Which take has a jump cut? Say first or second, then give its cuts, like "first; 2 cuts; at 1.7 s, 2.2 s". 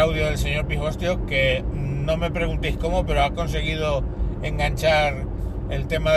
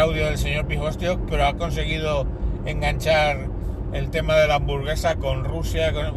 second; 1 cut; at 1.3 s